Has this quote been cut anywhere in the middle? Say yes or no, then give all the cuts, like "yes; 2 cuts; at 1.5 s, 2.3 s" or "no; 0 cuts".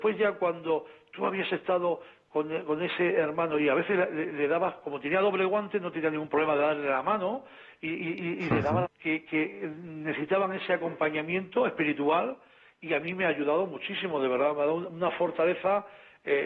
yes; 1 cut; at 8.8 s